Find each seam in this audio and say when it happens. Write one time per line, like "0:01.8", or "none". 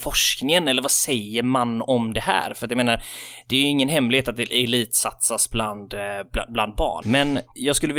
0:07.0

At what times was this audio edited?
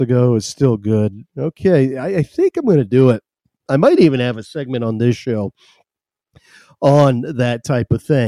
none

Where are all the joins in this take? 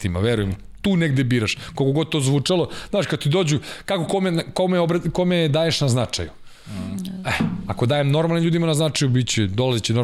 none

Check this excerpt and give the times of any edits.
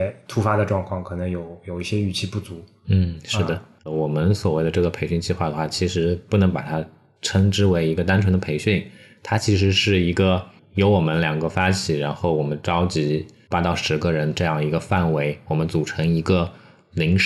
none

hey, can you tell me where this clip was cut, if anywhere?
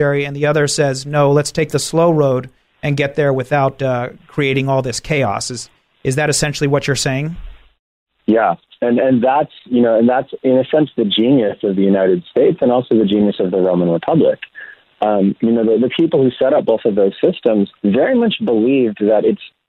0:17.8

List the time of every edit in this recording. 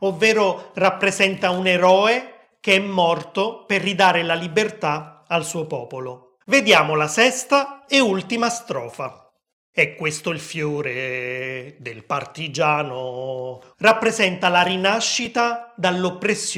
0:06.4
0:13.7

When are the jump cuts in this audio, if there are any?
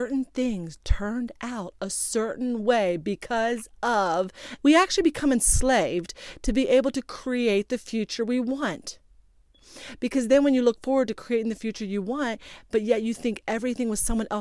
0:04.6

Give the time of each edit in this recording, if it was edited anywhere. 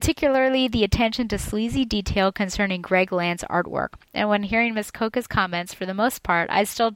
0:04.1

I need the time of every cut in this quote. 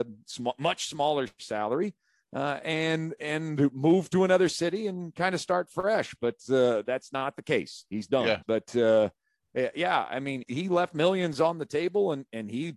0:08.4
0:10.4

